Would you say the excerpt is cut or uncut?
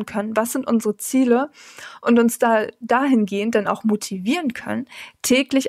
uncut